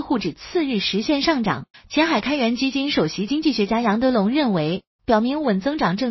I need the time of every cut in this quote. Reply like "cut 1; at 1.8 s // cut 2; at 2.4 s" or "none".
cut 1; at 1.7 s // cut 2; at 5.0 s